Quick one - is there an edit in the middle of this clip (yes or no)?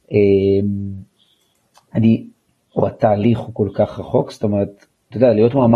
yes